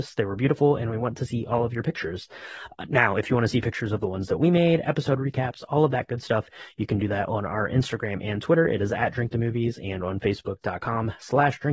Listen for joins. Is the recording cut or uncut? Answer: uncut